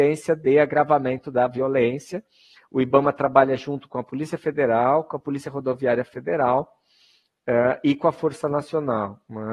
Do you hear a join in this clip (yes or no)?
yes